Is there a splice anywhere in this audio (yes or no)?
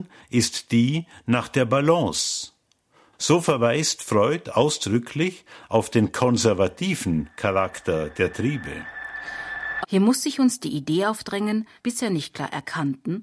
yes